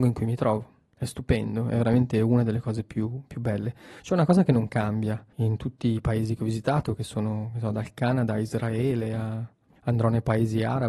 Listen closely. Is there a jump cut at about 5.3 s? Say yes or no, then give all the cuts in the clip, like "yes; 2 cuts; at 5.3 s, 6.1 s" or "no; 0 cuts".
yes; 1 cut; at 5.3 s